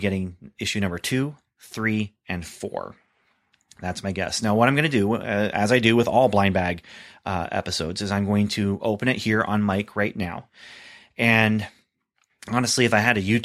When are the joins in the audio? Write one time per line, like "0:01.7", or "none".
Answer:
none